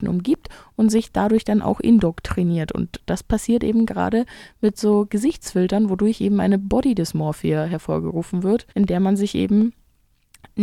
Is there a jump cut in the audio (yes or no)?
yes